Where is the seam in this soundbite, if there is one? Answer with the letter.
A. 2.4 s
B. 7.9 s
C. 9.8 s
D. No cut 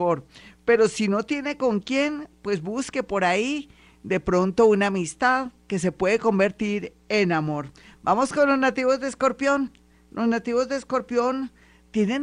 D